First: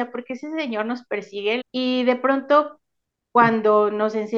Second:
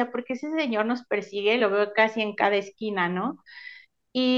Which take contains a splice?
first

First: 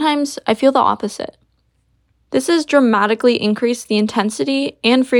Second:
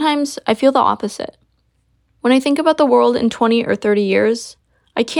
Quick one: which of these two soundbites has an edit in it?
first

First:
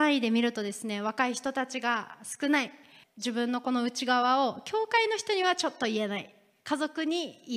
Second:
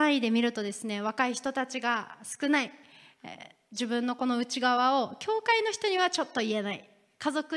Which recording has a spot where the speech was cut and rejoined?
first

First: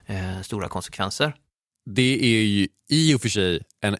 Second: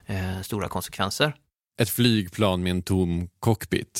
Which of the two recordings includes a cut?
second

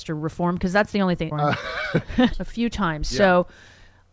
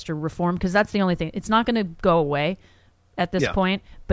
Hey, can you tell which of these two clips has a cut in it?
first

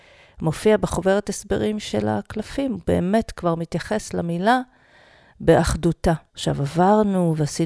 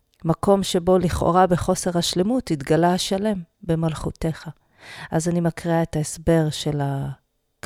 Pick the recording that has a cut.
first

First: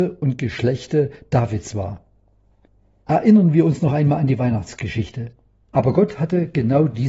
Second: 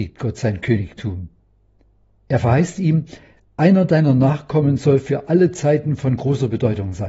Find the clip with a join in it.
first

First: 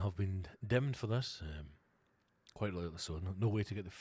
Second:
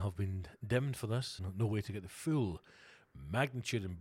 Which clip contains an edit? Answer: second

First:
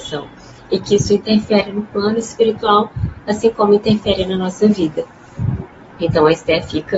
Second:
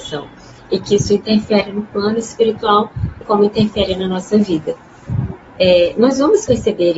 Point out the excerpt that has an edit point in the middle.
second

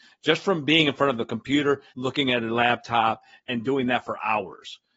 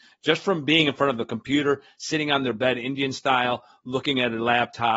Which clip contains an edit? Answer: first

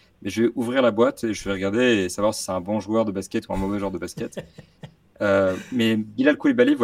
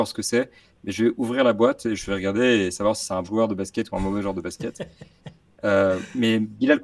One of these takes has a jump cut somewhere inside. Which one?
second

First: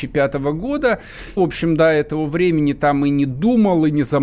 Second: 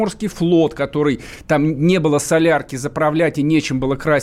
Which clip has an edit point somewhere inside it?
first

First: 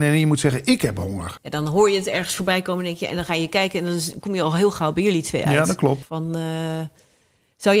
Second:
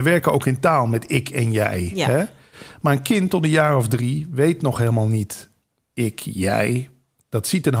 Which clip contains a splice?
first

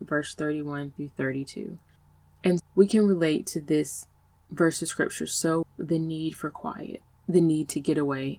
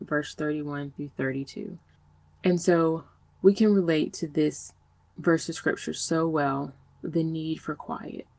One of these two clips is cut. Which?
first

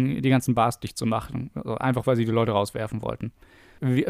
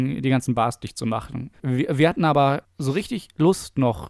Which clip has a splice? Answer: second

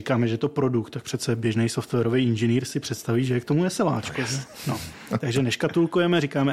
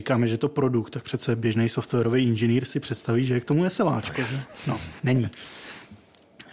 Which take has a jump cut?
second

